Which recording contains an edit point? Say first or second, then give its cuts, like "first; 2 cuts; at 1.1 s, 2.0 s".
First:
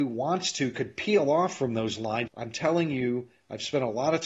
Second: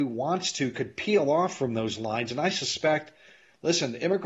first; 1 cut; at 2.3 s